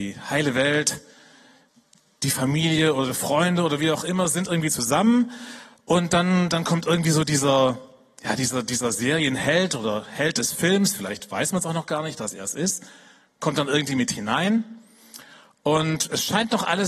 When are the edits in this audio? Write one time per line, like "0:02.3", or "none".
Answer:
none

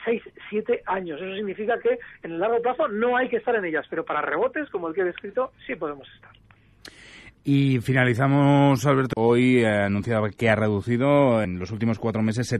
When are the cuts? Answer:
0:09.1
0:11.4

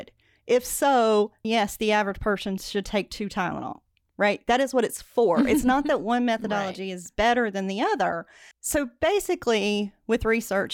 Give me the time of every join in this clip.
0:01.4
0:08.5

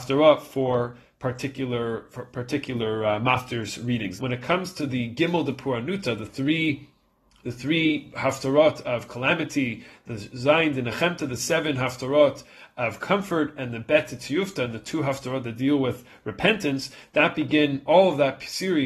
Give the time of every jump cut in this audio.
0:04.2

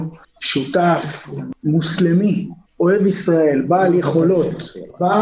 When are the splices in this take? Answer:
none

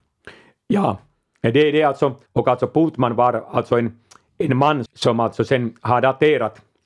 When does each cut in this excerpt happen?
0:02.3
0:04.9

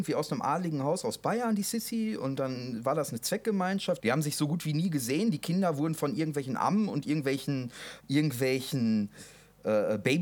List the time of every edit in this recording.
0:04.0
0:08.0

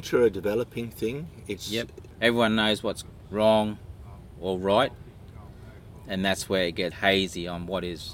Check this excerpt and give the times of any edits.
0:02.2
0:06.9

